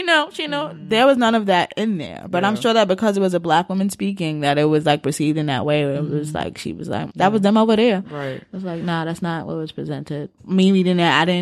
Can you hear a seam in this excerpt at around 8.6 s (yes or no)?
no